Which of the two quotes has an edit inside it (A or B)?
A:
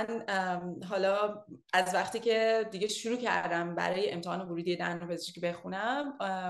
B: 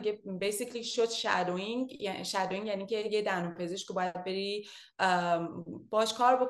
A